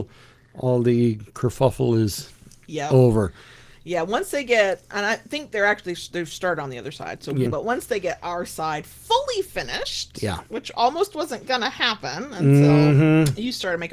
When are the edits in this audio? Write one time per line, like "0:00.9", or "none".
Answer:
0:07.5